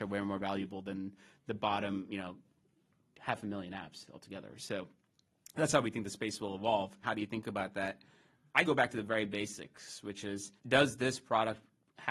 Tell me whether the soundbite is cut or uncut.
cut